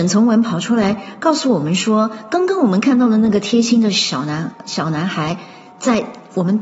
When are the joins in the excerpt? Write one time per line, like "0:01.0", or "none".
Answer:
none

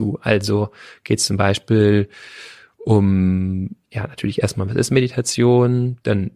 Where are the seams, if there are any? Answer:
0:03.8

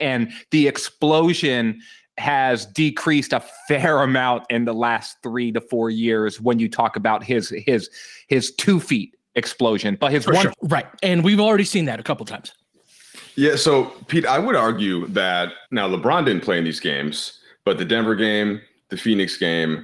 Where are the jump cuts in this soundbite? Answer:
0:10.5
0:15.6

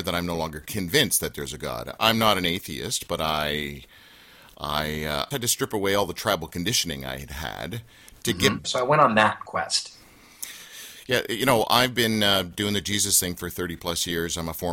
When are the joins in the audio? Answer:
0:05.3
0:08.6

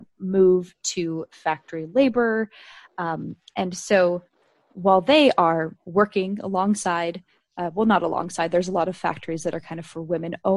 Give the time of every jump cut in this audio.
none

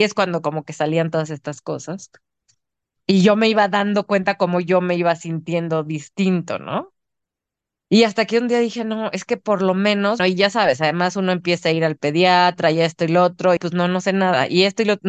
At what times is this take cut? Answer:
0:10.2
0:13.6

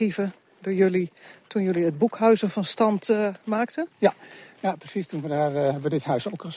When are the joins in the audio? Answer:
none

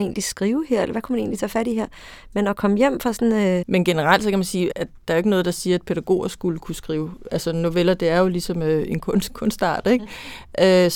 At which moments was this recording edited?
0:03.6
0:04.7

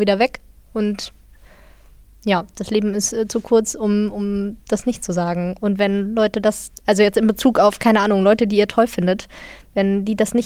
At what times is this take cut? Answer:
0:06.8

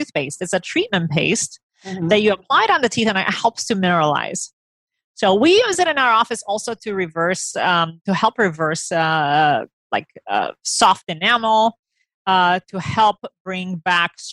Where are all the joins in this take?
none

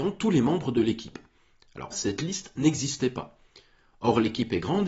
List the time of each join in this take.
0:01.9

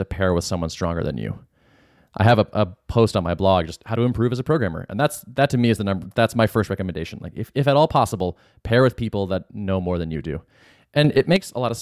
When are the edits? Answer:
none

